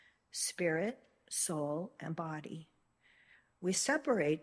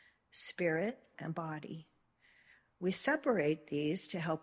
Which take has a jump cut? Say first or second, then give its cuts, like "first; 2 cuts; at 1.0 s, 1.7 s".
second; 1 cut; at 1.1 s